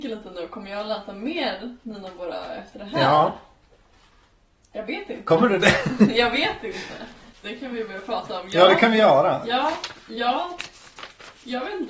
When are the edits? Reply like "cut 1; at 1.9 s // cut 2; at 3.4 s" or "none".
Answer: cut 1; at 7.4 s